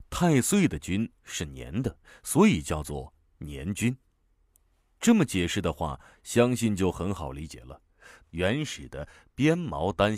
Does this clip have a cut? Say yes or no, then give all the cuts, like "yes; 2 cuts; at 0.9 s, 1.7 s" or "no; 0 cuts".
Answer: yes; 1 cut; at 8.2 s